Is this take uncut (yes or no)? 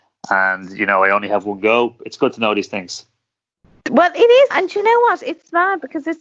no